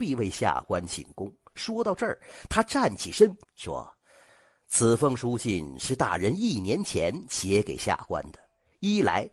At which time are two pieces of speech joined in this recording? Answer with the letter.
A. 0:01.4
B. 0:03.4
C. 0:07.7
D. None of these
B